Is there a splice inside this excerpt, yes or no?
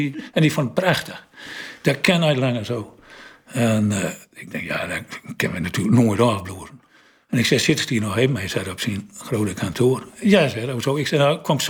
no